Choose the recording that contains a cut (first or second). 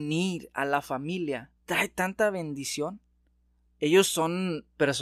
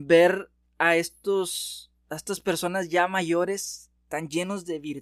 first